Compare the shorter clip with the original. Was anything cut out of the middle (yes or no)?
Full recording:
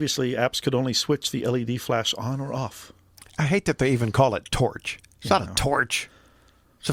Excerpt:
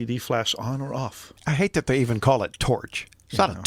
yes